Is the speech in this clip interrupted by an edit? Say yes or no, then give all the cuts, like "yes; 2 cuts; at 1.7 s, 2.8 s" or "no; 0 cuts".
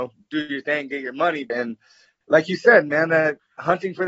yes; 1 cut; at 1.5 s